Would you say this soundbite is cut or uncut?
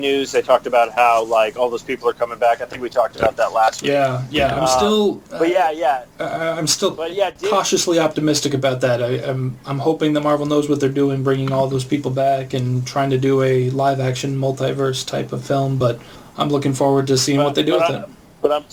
uncut